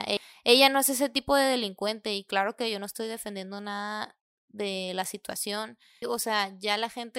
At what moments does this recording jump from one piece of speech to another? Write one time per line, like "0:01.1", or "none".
0:06.0